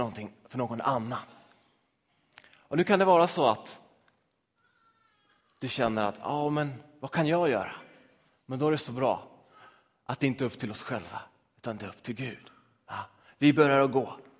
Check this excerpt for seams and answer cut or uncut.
uncut